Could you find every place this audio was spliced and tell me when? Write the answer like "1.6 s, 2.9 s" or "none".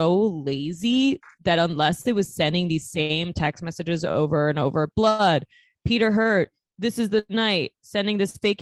none

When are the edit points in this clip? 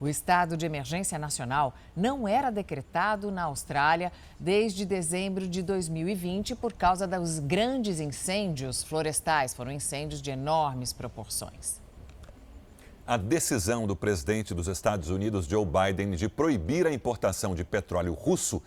none

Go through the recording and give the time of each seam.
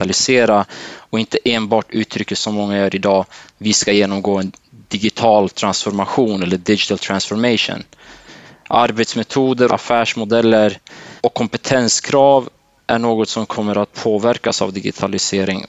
9.7 s, 11.2 s

